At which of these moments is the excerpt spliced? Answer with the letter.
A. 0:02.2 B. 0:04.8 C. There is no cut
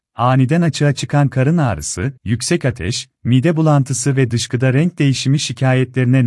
A